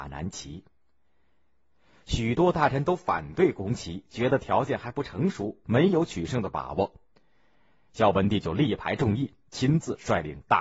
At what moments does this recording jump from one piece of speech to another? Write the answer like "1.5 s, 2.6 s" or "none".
none